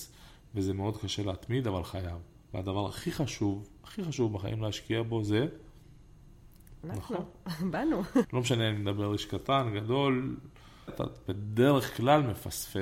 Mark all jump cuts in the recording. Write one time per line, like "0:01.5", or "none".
0:06.8
0:08.2
0:10.9